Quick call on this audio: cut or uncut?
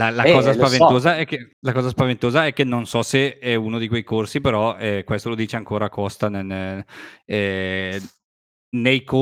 cut